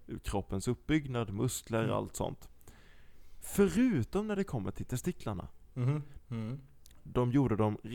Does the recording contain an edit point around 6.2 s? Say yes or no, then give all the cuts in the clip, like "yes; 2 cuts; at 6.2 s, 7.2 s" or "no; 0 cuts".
yes; 1 cut; at 6.2 s